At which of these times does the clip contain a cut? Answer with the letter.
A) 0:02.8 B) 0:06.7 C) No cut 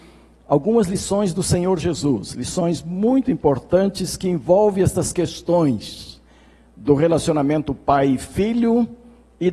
C